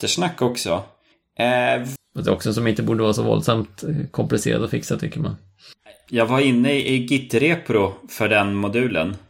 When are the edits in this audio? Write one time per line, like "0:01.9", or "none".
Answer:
0:02.0